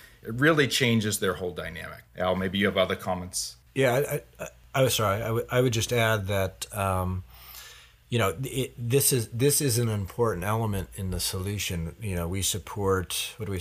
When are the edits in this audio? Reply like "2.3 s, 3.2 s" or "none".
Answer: none